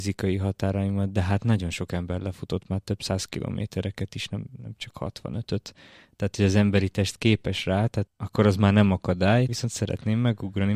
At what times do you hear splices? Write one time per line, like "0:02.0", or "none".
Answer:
0:08.1
0:09.5